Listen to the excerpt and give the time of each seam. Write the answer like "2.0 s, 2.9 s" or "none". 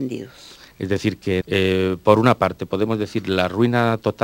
1.4 s